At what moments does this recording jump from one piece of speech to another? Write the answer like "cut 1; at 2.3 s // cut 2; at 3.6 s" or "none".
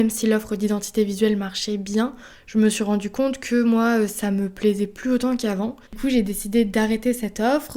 cut 1; at 5.9 s